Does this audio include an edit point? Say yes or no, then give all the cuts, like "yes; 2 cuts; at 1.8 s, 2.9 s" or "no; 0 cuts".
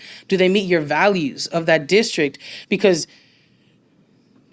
no; 0 cuts